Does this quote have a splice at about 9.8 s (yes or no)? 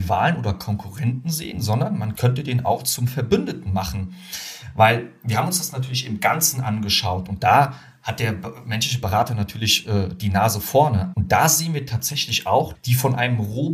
no